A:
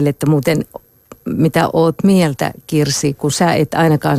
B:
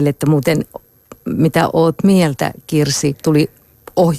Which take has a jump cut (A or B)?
B